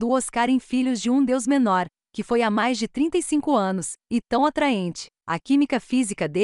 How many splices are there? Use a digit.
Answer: 1